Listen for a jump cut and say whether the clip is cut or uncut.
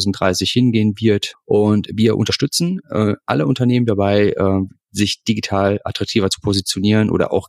cut